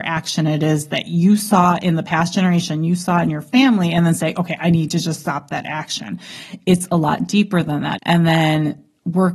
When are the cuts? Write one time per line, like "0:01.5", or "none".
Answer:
0:08.0